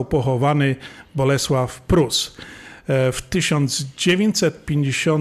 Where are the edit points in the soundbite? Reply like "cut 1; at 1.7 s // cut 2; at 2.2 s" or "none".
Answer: none